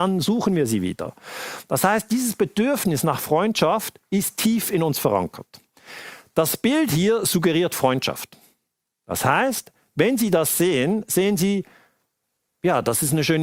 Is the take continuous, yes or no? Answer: yes